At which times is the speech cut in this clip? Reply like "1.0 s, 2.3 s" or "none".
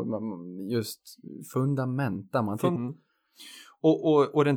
2.7 s

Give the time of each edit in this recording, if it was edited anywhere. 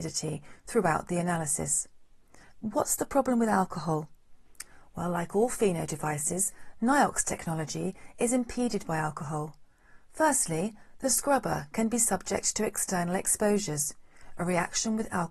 2.5 s

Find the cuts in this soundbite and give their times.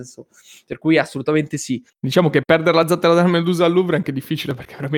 1.9 s

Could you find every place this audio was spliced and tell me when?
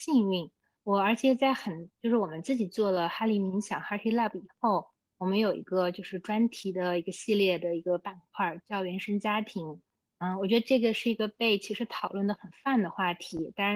none

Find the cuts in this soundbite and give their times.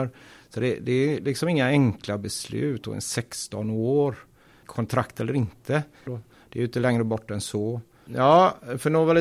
4.6 s, 6.1 s, 8.1 s

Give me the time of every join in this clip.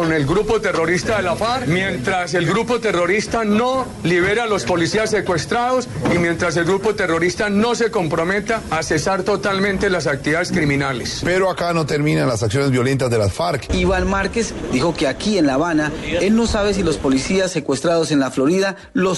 13.7 s

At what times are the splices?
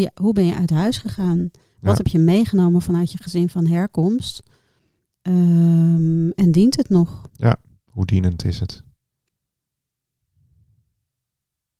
none

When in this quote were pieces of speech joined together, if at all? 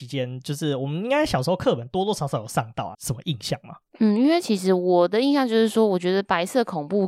2.9 s

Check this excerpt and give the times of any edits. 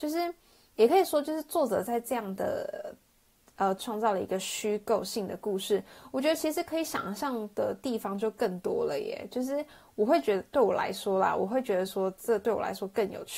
3.8 s

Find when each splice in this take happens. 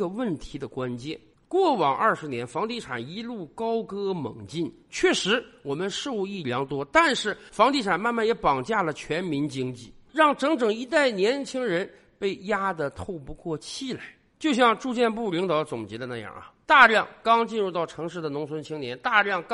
none

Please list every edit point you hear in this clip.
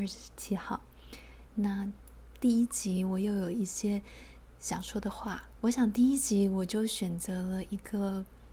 1.5 s, 5.6 s

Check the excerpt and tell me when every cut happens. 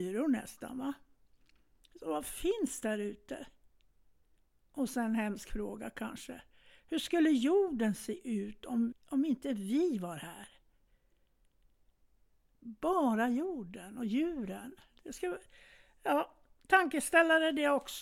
8.9 s

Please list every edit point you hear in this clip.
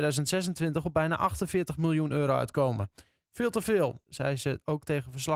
4.0 s

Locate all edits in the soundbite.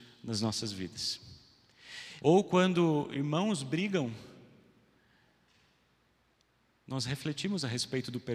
2.2 s

